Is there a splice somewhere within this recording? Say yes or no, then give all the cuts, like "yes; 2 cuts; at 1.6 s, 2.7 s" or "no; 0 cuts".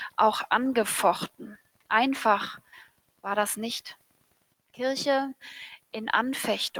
yes; 1 cut; at 4.5 s